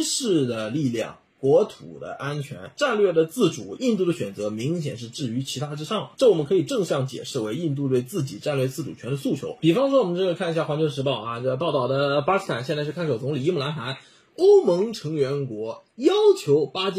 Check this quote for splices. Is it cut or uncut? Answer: uncut